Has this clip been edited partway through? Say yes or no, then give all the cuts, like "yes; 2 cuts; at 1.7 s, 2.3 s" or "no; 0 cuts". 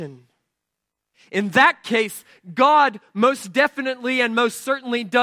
no; 0 cuts